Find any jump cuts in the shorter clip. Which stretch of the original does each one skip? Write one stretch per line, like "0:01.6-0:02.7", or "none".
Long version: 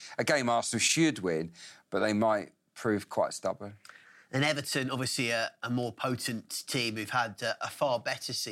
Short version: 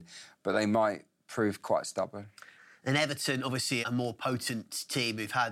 0:05.3-0:05.6